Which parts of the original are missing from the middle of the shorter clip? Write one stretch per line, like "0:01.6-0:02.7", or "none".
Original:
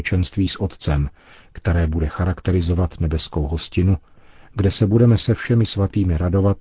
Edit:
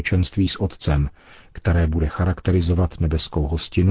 none